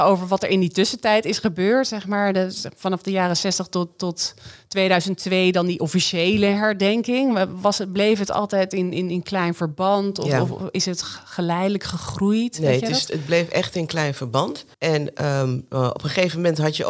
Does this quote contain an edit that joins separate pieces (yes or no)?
yes